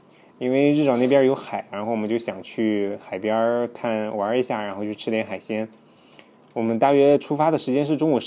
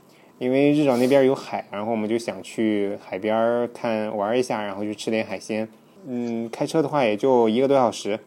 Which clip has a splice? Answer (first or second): second